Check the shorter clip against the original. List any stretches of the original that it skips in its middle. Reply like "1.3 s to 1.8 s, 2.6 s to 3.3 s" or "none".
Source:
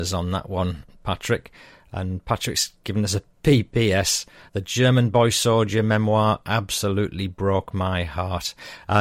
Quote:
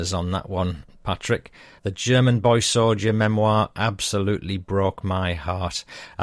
1.8 s to 4.5 s